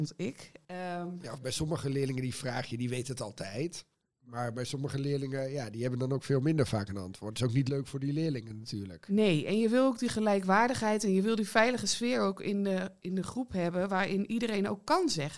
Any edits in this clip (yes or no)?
no